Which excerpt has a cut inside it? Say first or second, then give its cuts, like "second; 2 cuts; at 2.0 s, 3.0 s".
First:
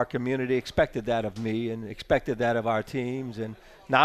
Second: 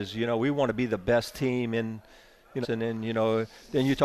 second; 1 cut; at 2.6 s